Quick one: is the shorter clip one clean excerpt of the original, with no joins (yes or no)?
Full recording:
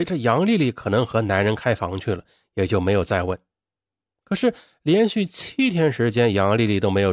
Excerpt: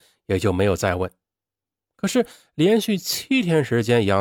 yes